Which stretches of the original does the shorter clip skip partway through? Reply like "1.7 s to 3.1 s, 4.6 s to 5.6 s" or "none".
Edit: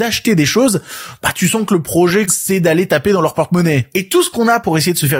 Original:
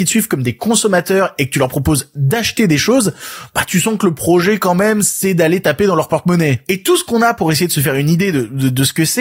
4.6 s to 5.0 s